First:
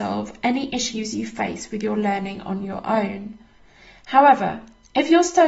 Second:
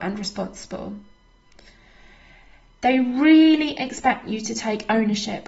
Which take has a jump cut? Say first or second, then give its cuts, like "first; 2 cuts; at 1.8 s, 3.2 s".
second; 1 cut; at 2.8 s